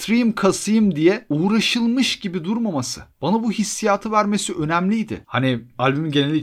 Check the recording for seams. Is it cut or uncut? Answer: cut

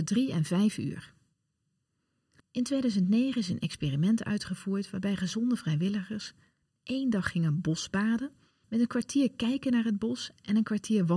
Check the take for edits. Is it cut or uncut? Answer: cut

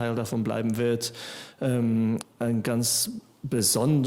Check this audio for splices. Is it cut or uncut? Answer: cut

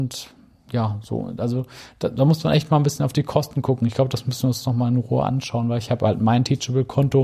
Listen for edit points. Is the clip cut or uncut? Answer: uncut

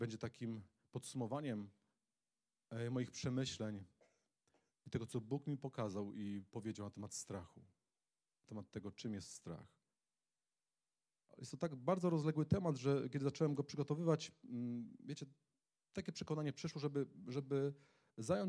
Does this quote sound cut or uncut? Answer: uncut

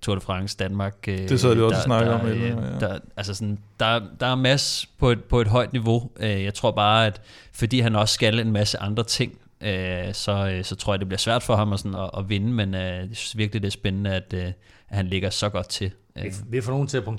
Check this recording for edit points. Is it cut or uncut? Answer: uncut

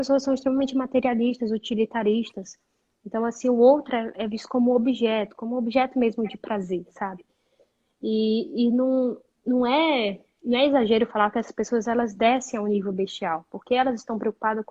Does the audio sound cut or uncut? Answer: uncut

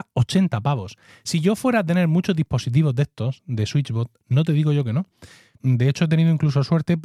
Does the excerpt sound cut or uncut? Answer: cut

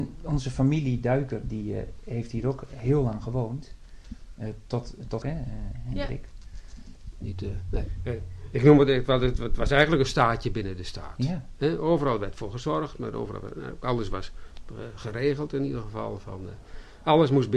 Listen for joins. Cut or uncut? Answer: cut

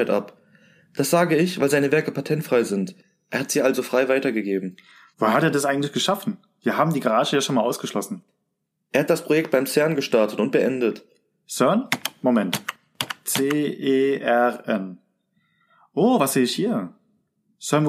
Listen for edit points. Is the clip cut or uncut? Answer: cut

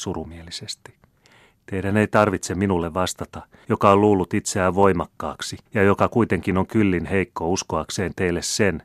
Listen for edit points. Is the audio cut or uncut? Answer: cut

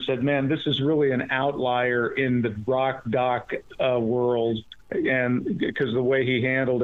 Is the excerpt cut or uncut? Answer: cut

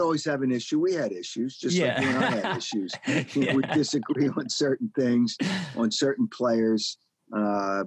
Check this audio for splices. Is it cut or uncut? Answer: uncut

